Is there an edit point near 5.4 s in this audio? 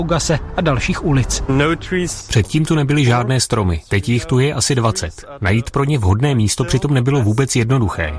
no; 0 cuts

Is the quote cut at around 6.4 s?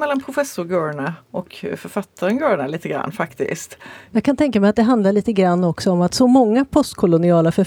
no; 1 cut; at 4.1 s

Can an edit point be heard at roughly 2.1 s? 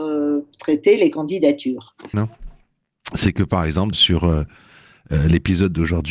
yes; 2 cuts; at 2.1 s, 3.9 s

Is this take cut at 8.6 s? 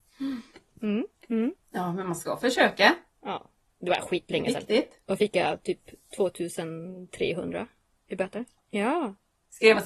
yes; 1 cut; at 8.6 s

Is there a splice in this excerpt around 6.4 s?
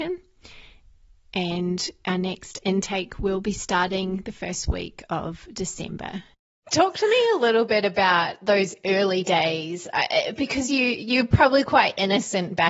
no; 0 cuts

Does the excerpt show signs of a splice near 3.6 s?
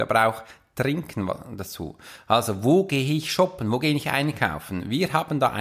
no; 0 cuts

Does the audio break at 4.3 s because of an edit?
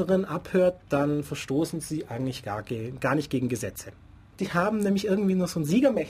yes; 1 cut; at 4.3 s

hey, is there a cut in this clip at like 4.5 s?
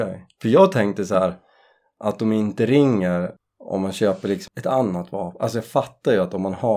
yes; 1 cut; at 4.5 s

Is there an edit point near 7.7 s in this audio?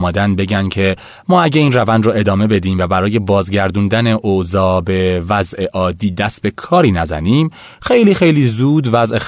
no; 0 cuts

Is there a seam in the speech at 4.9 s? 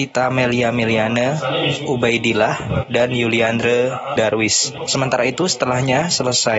yes; 1 cut; at 4.9 s

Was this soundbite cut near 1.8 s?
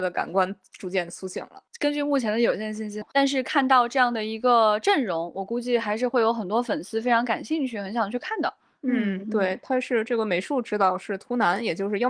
no; 1 cut; at 3.0 s

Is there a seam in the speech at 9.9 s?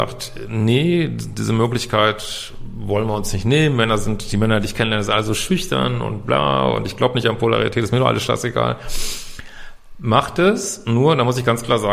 no; 0 cuts

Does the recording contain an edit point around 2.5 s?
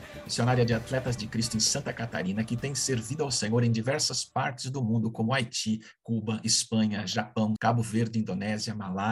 no; 1 cut; at 7.6 s

